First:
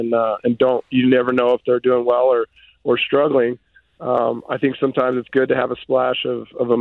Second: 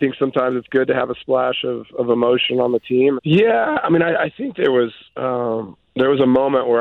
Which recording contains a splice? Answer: second; 1 cut; at 3.2 s

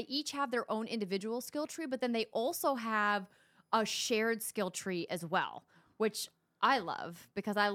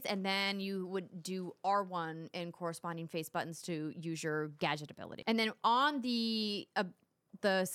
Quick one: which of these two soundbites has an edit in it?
second; 1 cut; at 5.2 s

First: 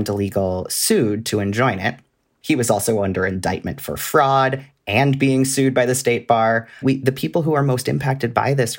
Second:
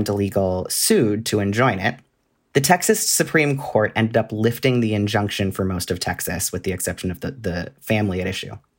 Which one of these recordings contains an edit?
first; 2 cuts; at 2.4 s, 6.8 s

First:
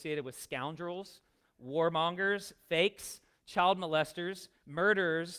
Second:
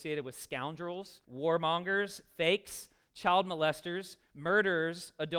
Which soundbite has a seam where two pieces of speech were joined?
second; 1 cut; at 1.2 s

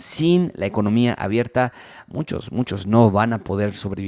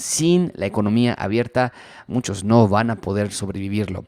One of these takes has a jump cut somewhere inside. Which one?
second; 1 cut; at 2.1 s

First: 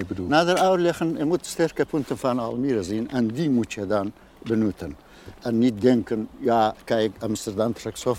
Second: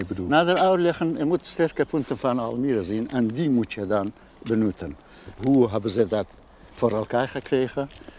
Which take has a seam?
second; 1 cut; at 5.4 s

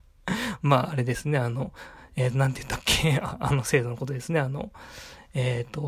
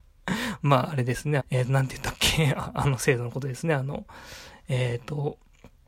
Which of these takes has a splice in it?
second; 1 cut; at 1.4 s

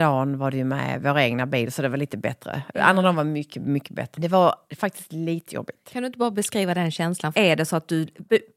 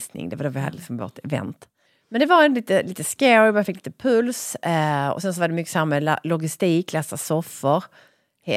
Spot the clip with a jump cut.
first; 2 cuts; at 4.1 s, 7.3 s

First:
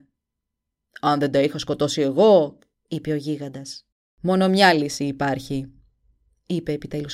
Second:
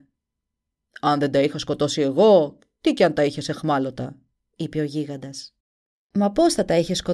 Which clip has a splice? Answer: first; 2 cuts; at 2.7 s, 4.1 s

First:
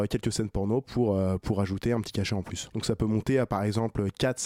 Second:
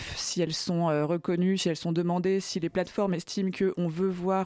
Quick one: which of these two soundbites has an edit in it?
first; 1 cut; at 2.7 s

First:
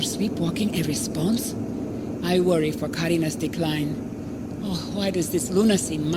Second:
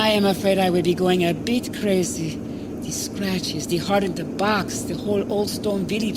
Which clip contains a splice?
first; 2 cuts; at 2.2 s, 4.6 s

